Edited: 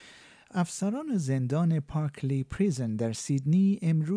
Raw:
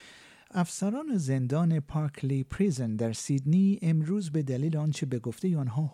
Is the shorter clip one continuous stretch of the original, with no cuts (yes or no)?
yes